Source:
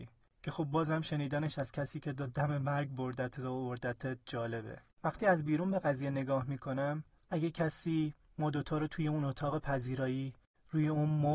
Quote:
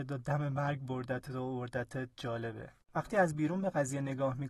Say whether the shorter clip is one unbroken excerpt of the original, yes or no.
yes